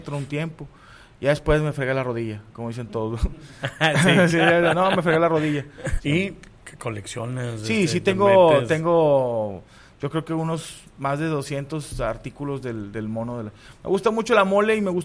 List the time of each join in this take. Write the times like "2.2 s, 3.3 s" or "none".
6.0 s